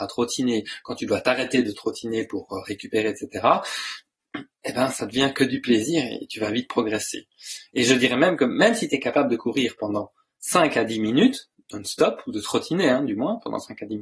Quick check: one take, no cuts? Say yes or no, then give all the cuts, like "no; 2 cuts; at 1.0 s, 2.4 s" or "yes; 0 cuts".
yes; 0 cuts